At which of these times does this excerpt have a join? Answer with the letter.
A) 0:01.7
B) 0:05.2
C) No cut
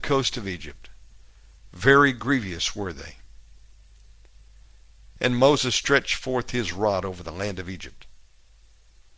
B